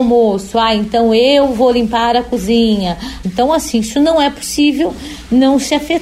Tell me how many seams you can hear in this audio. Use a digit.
1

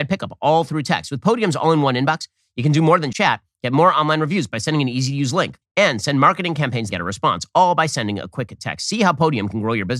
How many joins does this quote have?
3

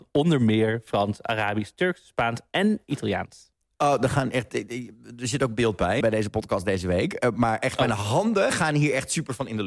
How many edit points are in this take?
1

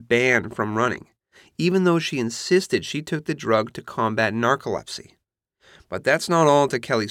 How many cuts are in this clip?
0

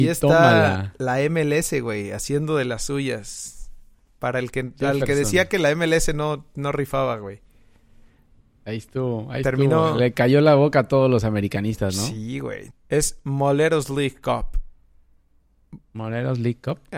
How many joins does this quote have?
1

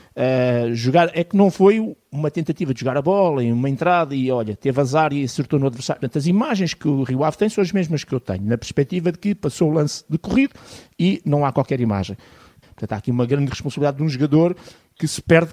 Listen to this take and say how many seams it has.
2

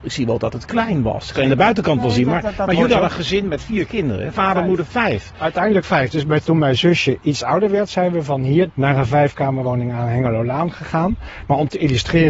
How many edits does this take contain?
2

